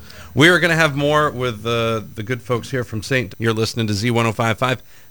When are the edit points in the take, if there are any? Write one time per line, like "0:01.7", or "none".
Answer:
0:03.3